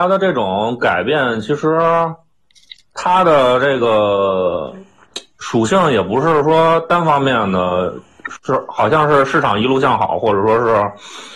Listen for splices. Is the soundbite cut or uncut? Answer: uncut